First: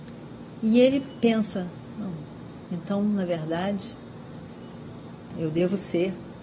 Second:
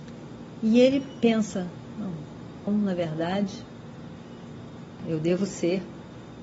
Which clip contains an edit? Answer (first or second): second